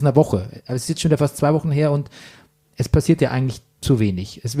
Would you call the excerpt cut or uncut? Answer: uncut